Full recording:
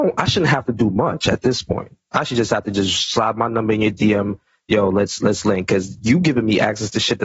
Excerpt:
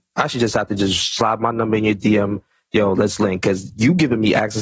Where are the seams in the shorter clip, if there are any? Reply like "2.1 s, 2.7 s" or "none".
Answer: 2.9 s